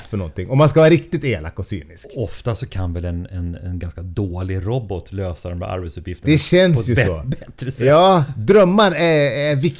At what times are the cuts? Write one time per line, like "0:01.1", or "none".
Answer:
none

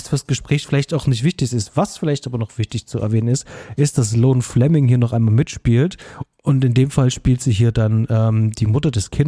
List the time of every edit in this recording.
none

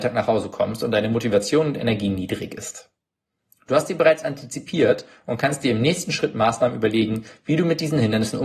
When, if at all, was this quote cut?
none

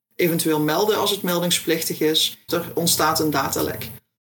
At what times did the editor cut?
0:02.5

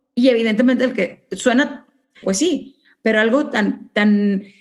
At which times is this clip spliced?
0:02.2

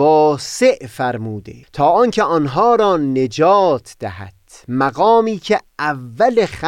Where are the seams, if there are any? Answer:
0:01.6

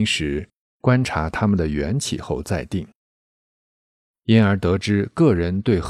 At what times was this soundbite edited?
0:04.1

